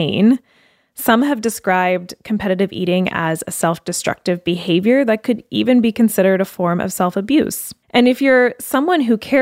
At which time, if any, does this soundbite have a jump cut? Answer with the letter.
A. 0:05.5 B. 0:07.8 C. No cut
B